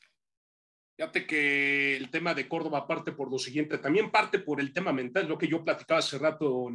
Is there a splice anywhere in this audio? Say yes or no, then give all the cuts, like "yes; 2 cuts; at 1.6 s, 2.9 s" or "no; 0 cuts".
no; 0 cuts